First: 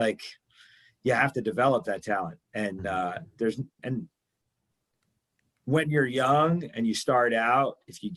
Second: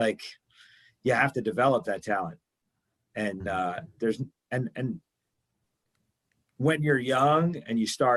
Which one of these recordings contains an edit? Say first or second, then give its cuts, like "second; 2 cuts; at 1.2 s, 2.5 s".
first; 2 cuts; at 2.4 s, 3.8 s